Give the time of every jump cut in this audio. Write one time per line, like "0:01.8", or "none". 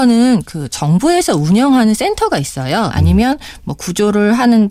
0:02.9